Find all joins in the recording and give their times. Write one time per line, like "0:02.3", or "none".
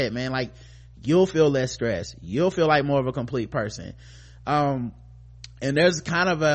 none